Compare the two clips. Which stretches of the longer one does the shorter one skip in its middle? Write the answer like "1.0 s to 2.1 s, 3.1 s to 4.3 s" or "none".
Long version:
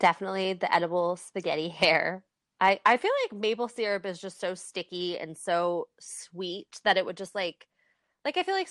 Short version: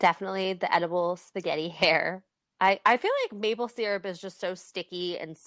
none